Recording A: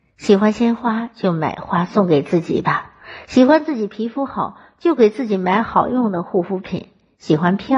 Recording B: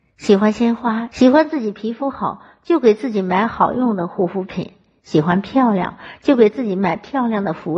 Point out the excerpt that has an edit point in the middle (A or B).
B